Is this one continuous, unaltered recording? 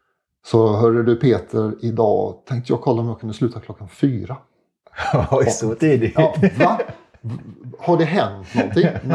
yes; 0 cuts

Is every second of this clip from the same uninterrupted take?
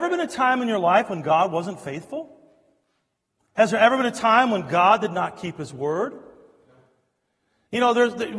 yes; 0 cuts

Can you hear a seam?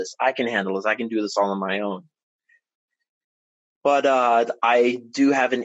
yes; 1 cut; at 3.7 s

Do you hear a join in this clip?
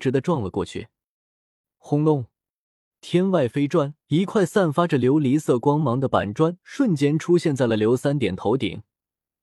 yes; 2 cuts; at 2.9 s, 4.0 s

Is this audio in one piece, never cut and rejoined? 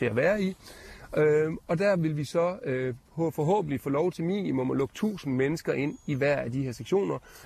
yes; 0 cuts

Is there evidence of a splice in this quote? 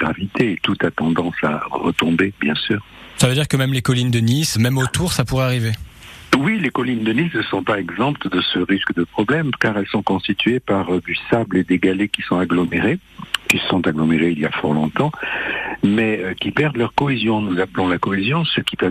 yes; 1 cut; at 4.6 s

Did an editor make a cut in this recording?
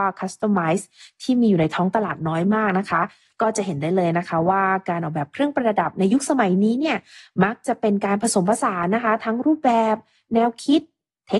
no; 0 cuts

